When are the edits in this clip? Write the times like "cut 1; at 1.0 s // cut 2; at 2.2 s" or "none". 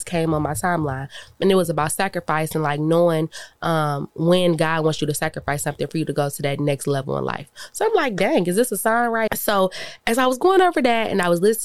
cut 1; at 9.3 s